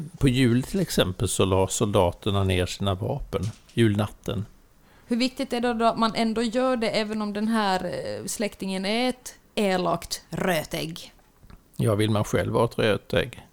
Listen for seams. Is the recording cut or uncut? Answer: cut